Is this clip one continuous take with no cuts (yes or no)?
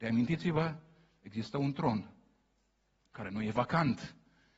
yes